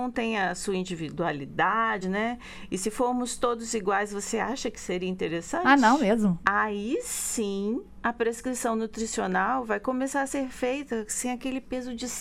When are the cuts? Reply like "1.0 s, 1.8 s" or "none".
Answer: 2.0 s, 6.4 s